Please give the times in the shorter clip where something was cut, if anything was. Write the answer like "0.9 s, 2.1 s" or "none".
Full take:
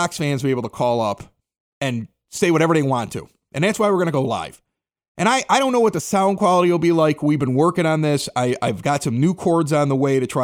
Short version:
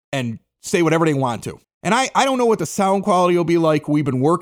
1.6 s